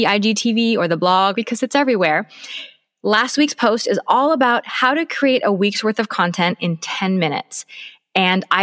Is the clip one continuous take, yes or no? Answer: no